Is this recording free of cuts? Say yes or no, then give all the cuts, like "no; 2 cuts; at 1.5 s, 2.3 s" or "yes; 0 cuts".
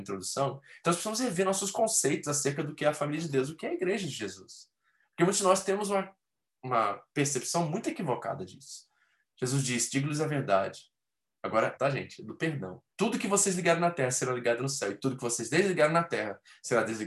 no; 2 cuts; at 11.8 s, 12.9 s